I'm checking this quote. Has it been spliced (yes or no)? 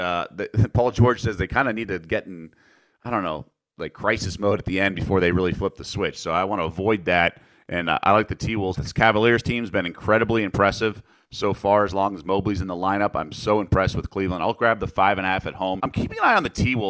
yes